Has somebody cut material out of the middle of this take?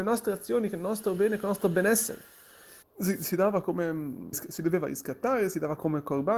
yes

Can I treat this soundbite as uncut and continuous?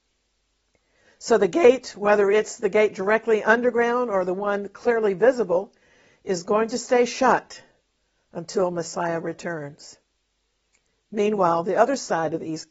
yes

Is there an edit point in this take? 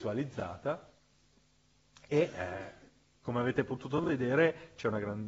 no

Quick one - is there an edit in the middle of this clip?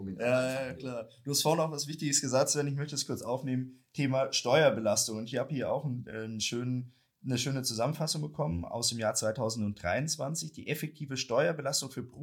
no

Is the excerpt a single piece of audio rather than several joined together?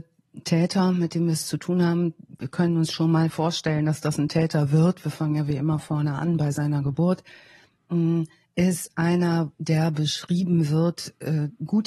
yes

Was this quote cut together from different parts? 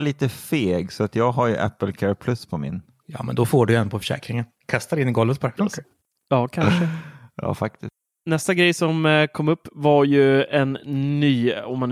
yes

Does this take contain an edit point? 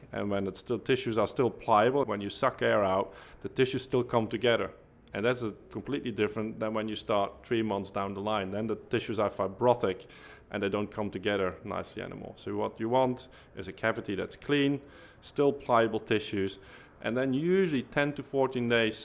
yes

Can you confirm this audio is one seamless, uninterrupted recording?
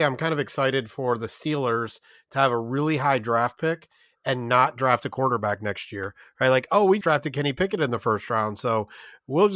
no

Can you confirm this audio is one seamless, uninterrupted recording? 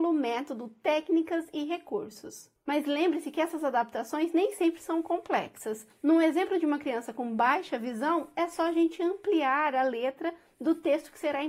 yes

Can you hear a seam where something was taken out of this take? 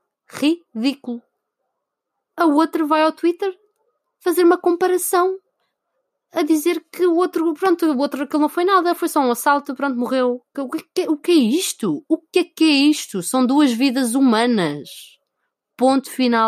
yes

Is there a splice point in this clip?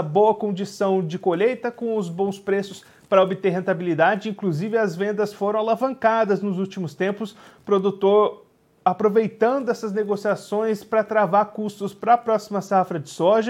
no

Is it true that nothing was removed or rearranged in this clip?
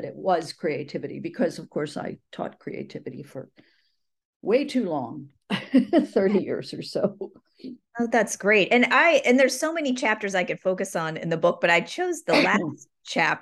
yes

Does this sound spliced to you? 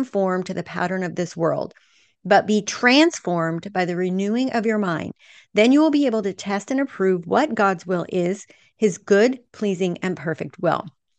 no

